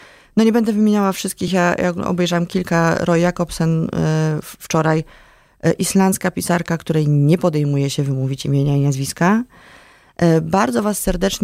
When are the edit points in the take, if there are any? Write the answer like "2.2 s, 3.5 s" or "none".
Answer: none